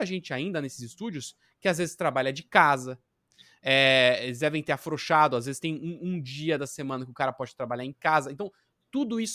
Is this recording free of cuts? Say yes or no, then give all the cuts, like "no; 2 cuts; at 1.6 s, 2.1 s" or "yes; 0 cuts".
yes; 0 cuts